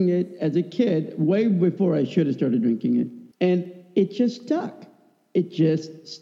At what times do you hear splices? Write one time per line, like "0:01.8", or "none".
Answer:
0:03.3